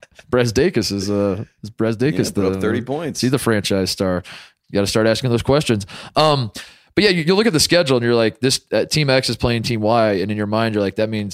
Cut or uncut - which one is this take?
uncut